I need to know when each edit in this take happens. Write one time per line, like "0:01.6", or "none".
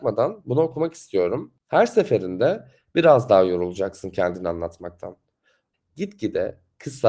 0:05.7

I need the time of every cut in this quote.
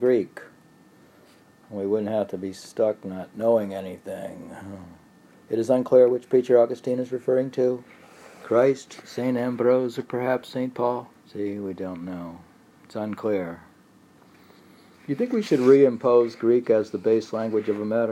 0:11.2

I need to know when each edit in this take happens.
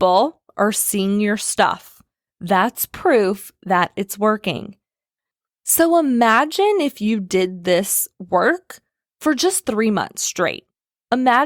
0:02.3

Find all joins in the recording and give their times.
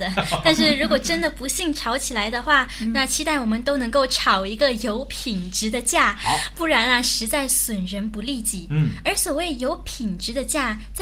none

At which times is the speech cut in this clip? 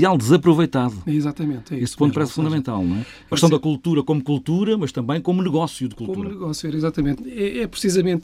0:03.3
0:07.2

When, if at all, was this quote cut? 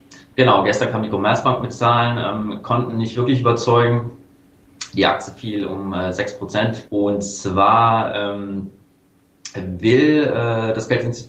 0:06.9

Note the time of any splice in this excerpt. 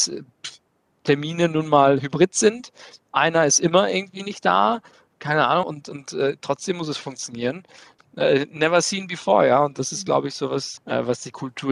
0:05.6
0:10.8

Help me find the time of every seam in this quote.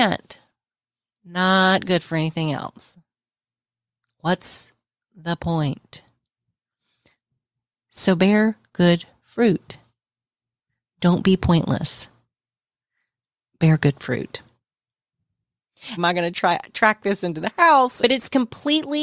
0:16.0
0:18.0

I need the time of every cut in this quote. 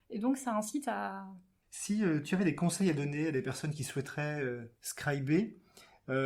0:01.6

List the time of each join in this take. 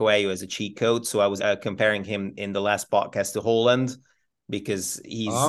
0:01.4

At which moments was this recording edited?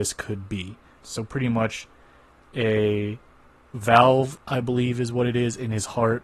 0:01.0

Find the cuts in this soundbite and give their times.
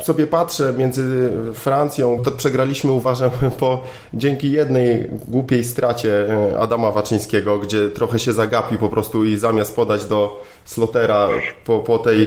0:02.2

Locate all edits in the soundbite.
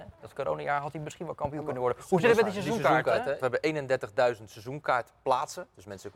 0:03.4

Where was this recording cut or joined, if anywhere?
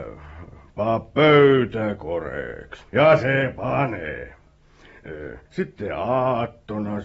0:02.9
0:05.5

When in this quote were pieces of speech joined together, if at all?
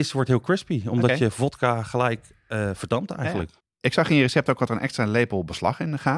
none

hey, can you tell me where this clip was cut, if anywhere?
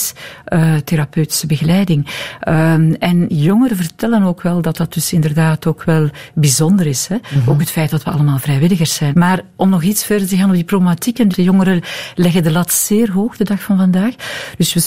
0:09.1
0:11.3

